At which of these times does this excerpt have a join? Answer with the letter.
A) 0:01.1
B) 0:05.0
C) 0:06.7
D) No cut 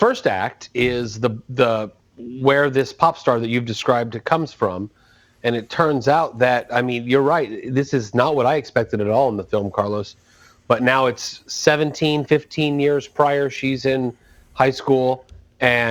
D